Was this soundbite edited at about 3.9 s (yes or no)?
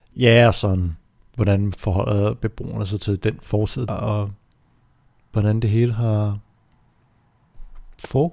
yes